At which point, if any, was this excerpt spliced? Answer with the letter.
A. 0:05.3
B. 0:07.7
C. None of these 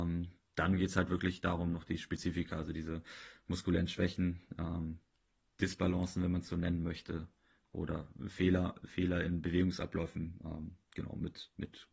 C